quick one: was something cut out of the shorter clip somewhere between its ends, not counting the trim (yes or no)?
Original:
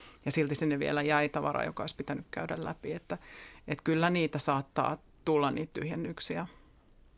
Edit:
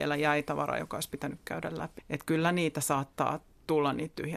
yes